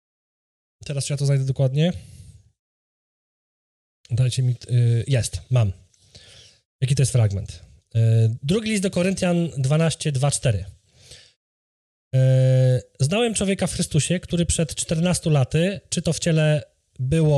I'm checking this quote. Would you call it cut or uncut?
uncut